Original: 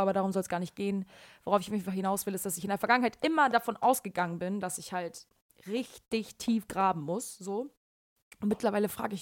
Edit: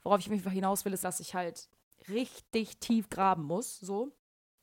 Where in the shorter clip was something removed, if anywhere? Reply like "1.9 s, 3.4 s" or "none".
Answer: 1.0 s